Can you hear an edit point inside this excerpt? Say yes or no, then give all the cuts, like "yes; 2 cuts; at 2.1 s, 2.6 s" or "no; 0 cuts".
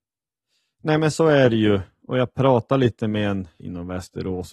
yes; 1 cut; at 3.6 s